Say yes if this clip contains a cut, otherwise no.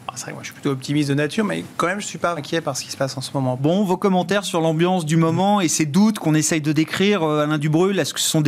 yes